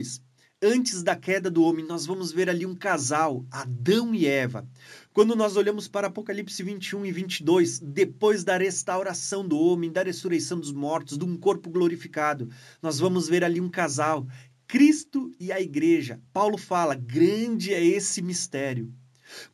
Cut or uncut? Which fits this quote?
uncut